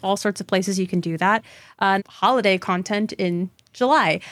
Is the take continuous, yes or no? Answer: no